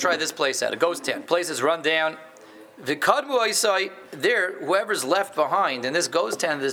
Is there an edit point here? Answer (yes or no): yes